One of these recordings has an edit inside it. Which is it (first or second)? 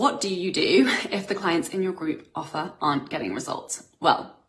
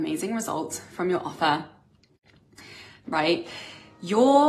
second